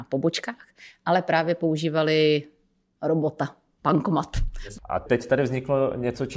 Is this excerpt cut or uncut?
cut